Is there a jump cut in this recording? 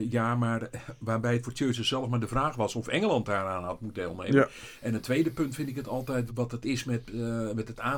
yes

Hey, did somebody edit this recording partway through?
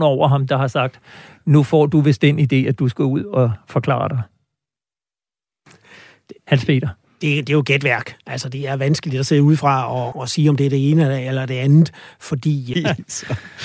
yes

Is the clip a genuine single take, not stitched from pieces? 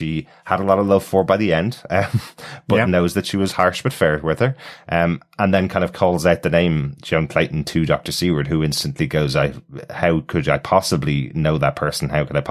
yes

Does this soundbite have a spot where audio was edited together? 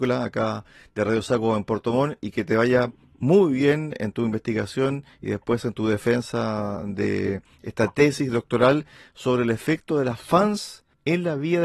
no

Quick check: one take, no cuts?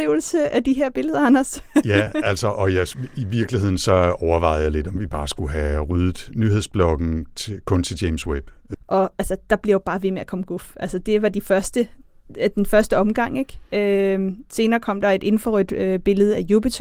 no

